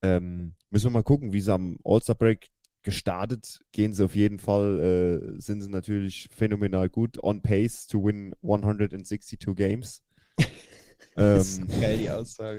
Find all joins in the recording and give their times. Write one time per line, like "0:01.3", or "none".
0:03.7